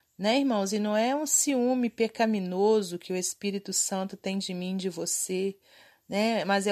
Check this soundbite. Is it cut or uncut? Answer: uncut